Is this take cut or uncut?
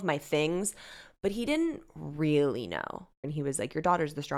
cut